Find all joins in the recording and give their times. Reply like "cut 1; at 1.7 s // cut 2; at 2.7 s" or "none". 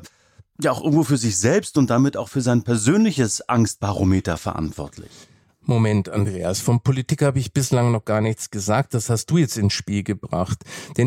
none

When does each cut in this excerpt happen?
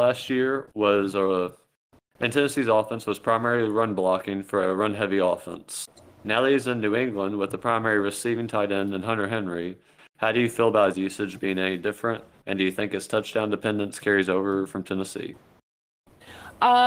cut 1; at 10.0 s

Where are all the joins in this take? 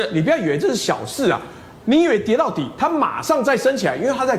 cut 1; at 1.8 s

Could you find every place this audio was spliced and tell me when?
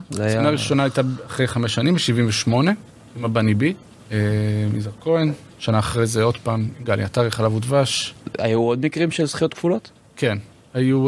cut 1; at 3.9 s

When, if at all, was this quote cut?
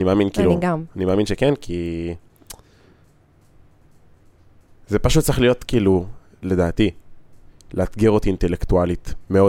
none

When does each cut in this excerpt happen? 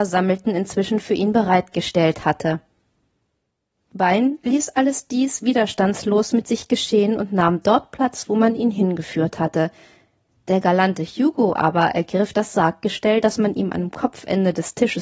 none

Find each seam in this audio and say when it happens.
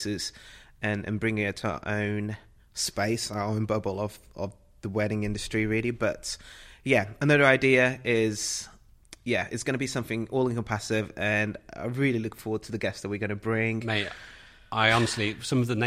none

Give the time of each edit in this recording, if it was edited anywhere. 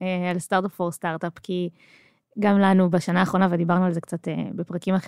none

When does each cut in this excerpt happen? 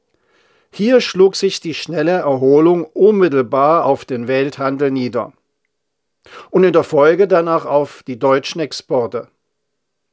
none

